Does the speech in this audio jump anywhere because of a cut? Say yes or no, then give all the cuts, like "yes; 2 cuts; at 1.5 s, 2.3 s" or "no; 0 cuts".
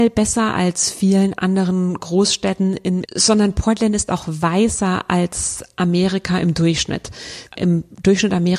yes; 2 cuts; at 3.0 s, 7.5 s